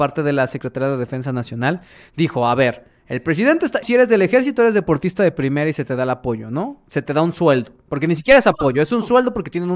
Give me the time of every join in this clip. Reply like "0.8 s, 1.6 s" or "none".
3.8 s